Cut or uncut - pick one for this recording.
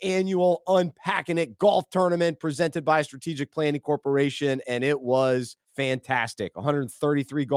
cut